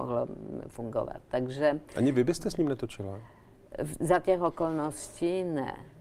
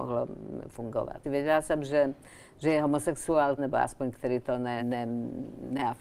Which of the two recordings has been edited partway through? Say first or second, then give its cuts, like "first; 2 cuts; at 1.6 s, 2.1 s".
second; 3 cuts; at 1.2 s, 3.6 s, 4.8 s